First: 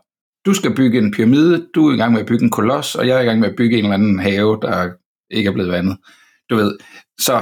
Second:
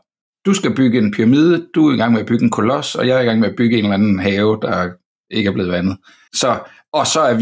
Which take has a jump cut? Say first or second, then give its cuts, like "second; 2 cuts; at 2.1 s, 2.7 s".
second; 1 cut; at 6.3 s